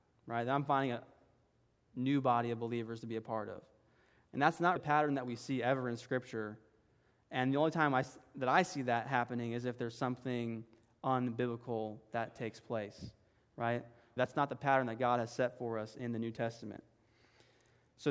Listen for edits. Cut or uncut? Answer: cut